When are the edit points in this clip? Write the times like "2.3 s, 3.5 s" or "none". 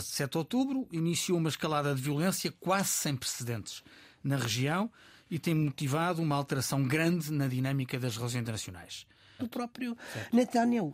9.4 s